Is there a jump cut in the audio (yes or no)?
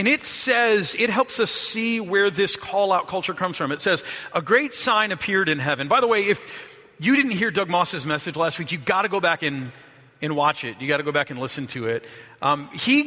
no